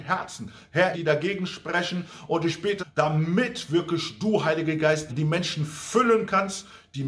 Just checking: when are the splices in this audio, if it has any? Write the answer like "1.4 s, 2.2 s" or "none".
0.9 s, 2.8 s, 5.1 s